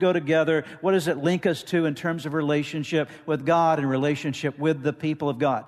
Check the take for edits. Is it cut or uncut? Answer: uncut